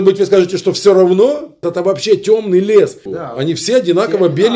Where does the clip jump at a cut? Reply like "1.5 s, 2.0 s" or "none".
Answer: 1.6 s, 3.1 s